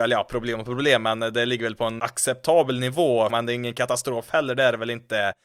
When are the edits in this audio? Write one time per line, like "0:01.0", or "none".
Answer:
0:02.0
0:03.3